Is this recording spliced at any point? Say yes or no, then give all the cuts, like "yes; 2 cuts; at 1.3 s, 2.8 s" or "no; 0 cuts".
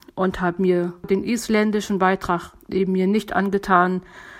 no; 0 cuts